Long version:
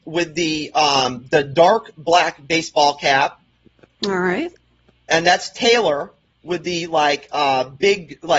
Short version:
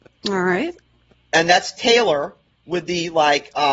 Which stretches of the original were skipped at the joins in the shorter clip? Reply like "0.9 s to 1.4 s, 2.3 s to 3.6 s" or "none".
none